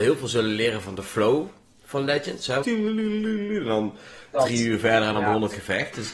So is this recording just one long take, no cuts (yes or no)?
no